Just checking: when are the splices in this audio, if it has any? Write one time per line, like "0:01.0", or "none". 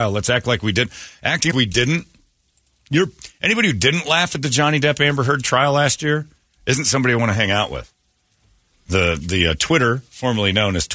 0:01.5
0:08.7